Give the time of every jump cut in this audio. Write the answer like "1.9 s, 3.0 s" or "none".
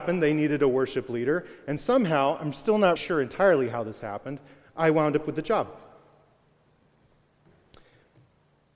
3.0 s